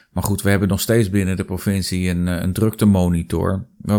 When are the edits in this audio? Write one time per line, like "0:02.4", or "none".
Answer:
none